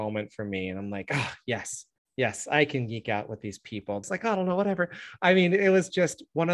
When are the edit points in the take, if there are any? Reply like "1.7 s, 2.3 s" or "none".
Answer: 4.0 s